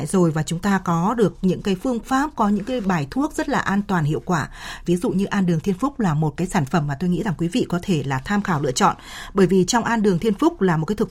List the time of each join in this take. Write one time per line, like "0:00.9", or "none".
0:04.8